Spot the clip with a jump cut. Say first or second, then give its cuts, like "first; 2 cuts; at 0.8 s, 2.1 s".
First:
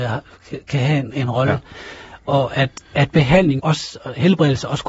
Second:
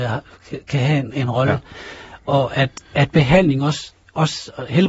first; 1 cut; at 3.6 s